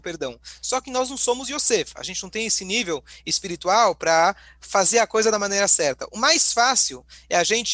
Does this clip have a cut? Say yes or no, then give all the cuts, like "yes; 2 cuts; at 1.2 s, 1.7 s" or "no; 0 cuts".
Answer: no; 0 cuts